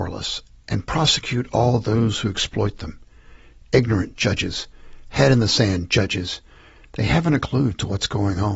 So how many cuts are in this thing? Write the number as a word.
zero